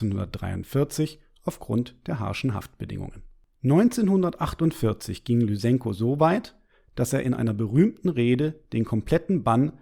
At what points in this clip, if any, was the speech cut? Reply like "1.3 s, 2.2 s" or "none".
none